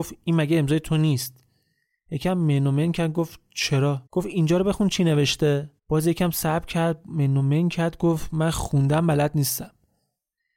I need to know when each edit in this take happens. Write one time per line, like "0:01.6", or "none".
0:04.1
0:05.8